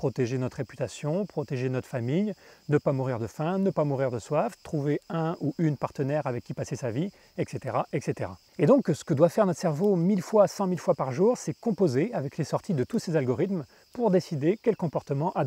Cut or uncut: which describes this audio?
uncut